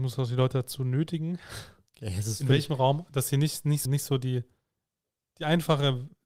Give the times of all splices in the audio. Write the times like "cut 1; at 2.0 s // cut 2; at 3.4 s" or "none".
cut 1; at 3.8 s